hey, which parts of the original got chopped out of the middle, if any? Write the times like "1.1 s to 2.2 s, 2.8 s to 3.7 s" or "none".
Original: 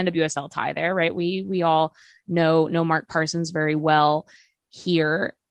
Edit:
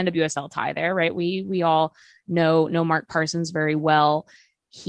none